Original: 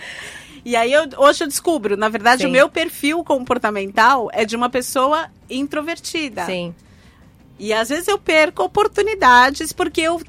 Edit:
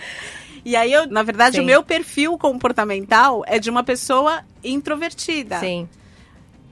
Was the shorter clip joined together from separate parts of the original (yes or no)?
yes